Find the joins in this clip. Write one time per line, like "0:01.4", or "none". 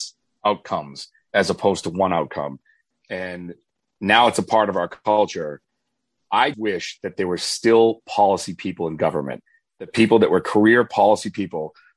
0:02.9
0:06.5

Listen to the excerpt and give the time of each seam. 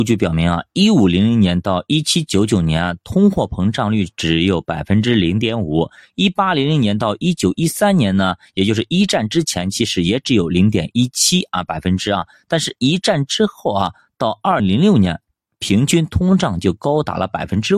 0:14.6

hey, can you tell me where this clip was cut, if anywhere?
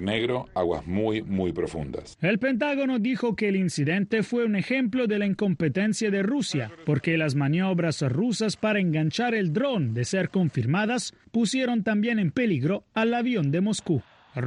none

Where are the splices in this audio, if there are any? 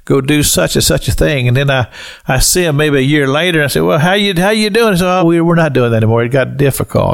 0:05.2

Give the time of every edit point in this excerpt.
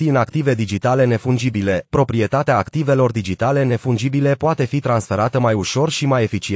none

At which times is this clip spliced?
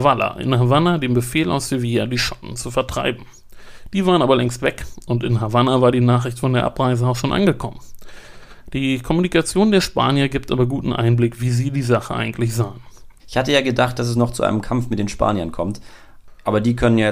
0:13.2

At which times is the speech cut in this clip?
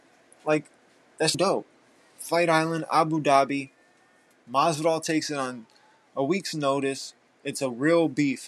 0:01.3

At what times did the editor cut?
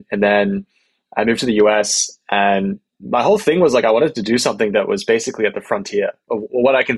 none

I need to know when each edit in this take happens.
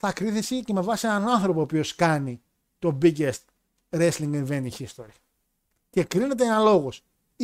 none

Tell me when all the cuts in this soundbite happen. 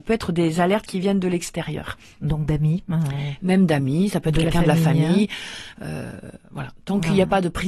none

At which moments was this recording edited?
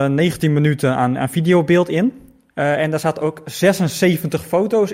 0:02.5

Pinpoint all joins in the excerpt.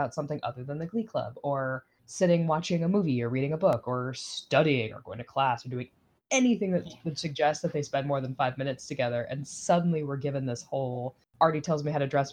none

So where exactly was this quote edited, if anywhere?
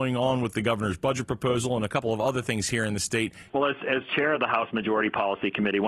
0:03.5

